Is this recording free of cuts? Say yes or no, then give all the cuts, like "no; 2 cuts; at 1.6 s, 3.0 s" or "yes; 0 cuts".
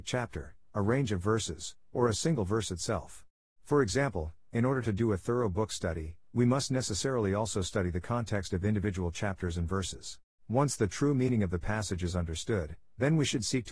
no; 2 cuts; at 3.5 s, 10.3 s